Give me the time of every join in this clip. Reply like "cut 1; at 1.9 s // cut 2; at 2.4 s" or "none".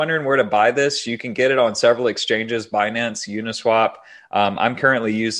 none